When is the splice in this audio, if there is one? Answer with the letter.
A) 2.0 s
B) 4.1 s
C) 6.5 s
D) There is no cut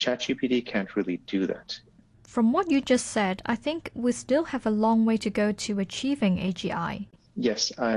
D